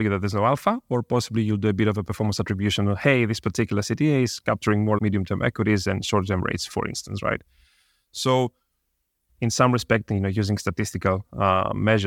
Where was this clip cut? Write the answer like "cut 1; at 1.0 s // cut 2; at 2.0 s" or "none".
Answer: cut 1; at 5.0 s // cut 2; at 9.3 s